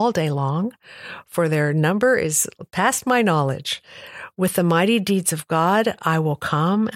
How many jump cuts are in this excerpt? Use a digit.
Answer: 0